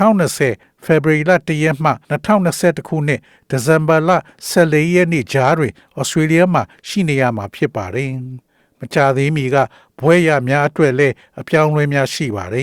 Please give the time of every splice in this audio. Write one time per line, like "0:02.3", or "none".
0:02.0